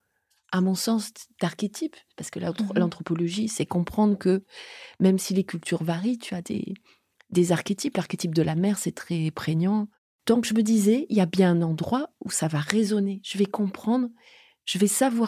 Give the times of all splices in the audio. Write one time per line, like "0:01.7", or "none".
none